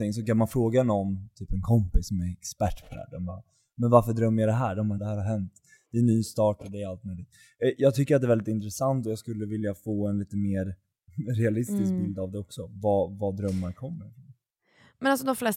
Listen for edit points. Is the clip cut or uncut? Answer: cut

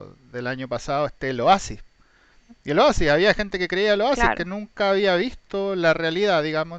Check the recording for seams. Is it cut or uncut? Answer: uncut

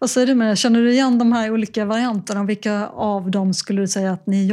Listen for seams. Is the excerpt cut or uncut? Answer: uncut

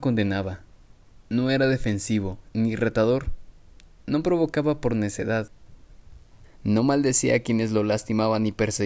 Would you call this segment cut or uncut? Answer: cut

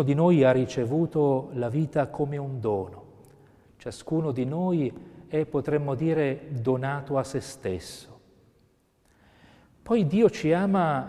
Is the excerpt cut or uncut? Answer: uncut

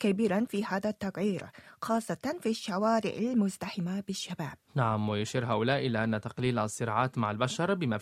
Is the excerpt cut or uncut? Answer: cut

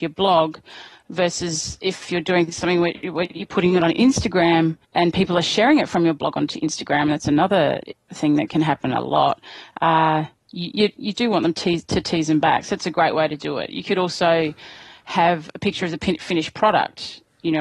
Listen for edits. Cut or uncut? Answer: cut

